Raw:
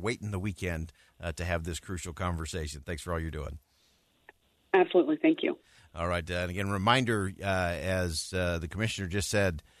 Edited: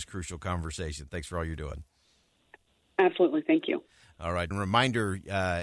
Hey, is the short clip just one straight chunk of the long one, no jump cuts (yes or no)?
no